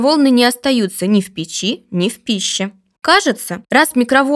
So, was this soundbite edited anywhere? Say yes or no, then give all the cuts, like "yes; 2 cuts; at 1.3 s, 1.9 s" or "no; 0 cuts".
no; 0 cuts